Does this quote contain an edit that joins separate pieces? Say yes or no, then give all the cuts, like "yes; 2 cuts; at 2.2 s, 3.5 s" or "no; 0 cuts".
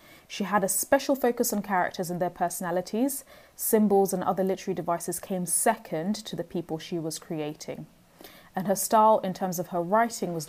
no; 0 cuts